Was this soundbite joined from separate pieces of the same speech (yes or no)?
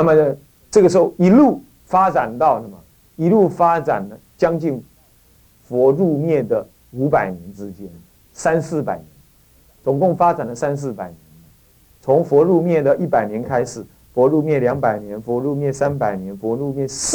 no